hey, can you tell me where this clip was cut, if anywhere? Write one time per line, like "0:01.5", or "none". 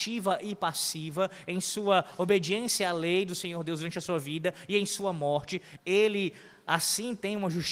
0:05.8